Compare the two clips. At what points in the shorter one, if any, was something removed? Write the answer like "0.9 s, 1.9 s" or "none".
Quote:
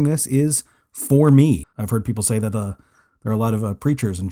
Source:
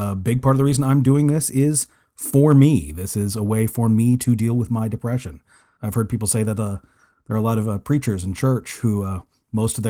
1.6 s